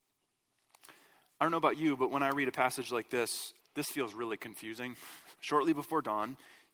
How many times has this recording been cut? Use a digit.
2